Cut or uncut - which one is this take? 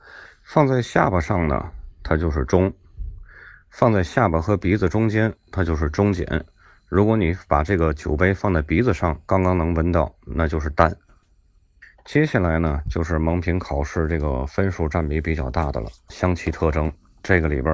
uncut